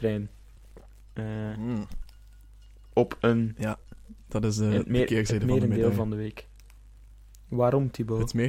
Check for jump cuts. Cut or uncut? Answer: uncut